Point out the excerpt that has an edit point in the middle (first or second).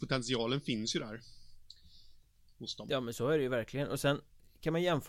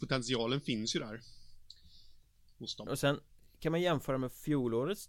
second